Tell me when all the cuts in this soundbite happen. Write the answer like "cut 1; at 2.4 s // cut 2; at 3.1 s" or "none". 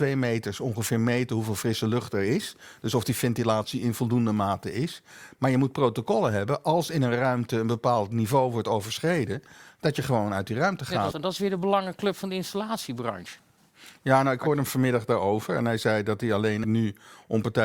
cut 1; at 11.1 s // cut 2; at 16.6 s